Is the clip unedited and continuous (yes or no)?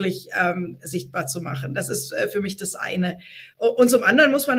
yes